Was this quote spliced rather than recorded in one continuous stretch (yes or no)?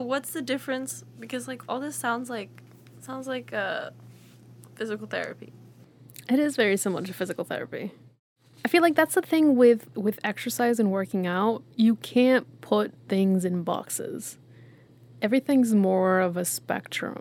no